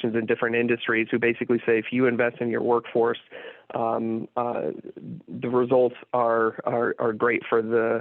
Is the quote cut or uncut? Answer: uncut